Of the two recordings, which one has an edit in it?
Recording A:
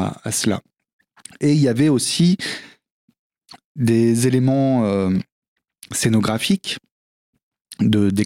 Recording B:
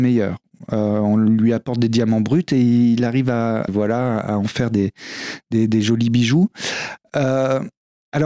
B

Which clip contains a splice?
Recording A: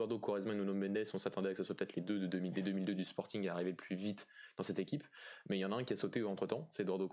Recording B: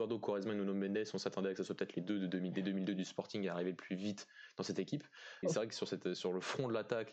B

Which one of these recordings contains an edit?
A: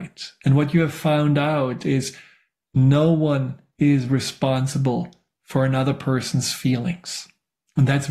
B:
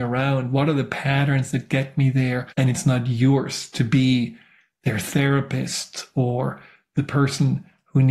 B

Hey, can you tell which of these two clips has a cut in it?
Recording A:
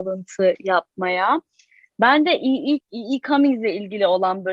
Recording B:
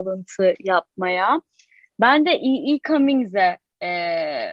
A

